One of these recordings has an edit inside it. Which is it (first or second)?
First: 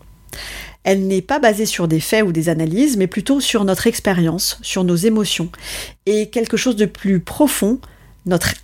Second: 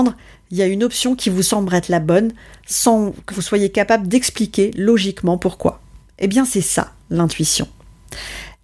second